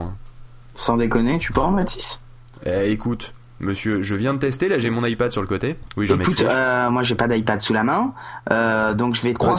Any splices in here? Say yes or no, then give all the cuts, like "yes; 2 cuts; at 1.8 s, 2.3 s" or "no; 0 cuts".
yes; 1 cut; at 6.1 s